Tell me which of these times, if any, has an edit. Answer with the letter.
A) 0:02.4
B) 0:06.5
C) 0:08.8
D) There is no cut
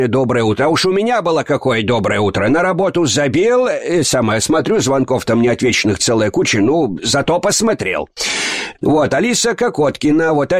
C